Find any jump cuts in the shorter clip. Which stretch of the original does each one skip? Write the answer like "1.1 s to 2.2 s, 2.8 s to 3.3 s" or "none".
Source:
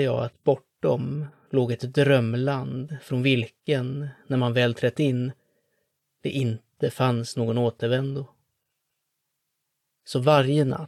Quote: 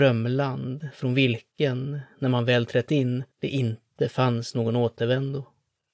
5.4 s to 6.1 s